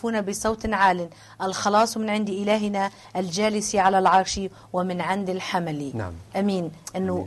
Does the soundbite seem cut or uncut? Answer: cut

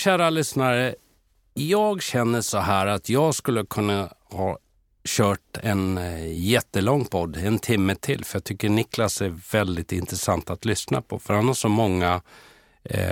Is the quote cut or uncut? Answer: uncut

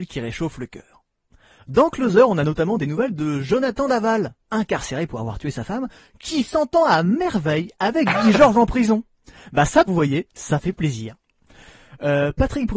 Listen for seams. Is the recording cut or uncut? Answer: cut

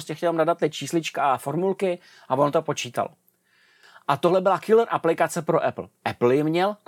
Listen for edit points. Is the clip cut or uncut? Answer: uncut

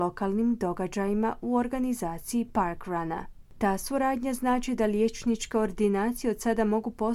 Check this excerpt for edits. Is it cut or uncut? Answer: cut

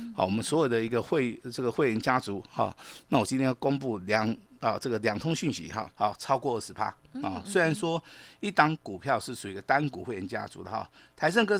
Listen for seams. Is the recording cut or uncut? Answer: cut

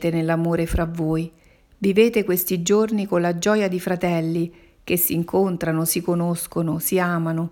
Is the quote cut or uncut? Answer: uncut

